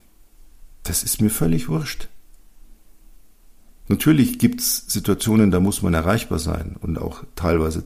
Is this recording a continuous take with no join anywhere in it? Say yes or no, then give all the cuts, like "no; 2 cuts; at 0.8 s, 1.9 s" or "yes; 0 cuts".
yes; 0 cuts